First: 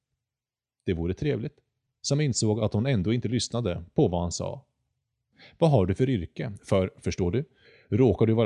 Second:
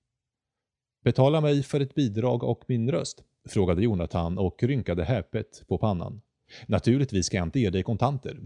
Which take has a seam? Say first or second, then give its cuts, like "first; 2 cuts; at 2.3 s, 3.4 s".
first; 1 cut; at 1.9 s